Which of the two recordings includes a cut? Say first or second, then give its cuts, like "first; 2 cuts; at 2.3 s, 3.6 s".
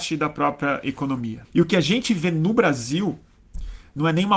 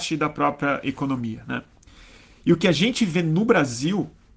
first; 1 cut; at 1.4 s